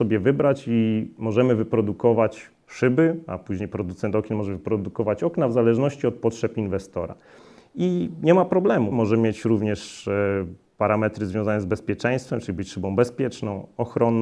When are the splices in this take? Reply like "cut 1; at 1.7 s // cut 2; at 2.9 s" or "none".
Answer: cut 1; at 8.9 s